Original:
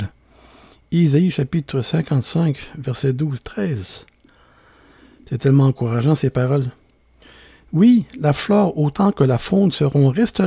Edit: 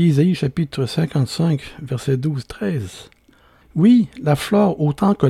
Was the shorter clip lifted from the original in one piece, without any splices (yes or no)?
no